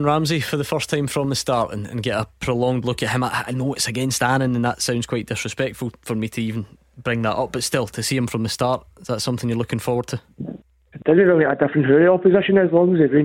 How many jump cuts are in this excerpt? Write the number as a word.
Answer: zero